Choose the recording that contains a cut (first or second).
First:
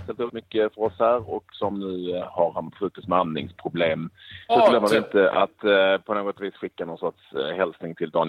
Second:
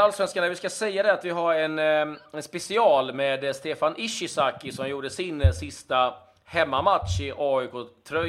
first